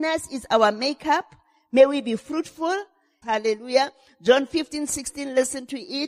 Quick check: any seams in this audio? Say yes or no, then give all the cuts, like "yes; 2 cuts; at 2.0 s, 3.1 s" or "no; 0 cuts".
yes; 1 cut; at 3.2 s